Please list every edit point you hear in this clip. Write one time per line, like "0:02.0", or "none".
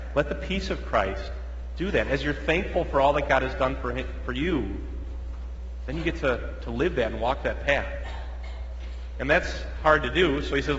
none

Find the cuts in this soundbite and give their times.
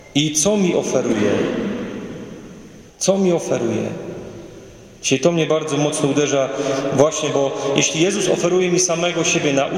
0:02.9

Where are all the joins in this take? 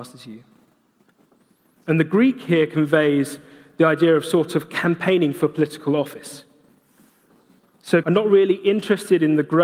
0:01.8
0:08.0

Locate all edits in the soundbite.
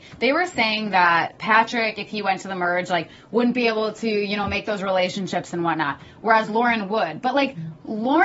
none

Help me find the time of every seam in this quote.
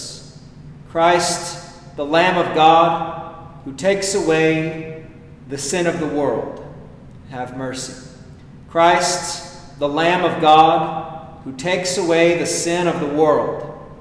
none

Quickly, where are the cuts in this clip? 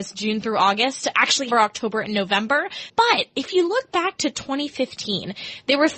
0:01.5
0:02.9

